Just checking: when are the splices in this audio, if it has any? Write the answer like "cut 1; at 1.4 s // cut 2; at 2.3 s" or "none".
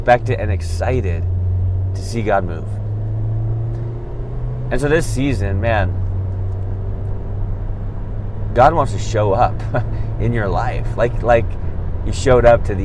none